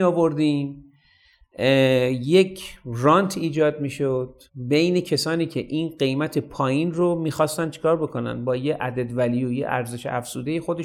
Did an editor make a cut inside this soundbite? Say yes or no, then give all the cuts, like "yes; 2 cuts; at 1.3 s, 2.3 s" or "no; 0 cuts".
yes; 1 cut; at 4.5 s